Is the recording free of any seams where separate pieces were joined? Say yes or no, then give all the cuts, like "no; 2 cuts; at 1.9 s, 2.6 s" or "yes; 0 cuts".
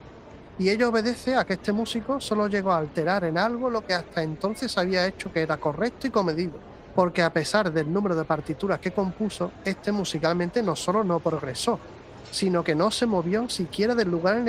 no; 1 cut; at 7.0 s